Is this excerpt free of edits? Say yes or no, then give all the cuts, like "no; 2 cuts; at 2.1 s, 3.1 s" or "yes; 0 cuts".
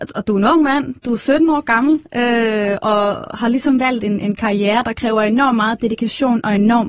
yes; 0 cuts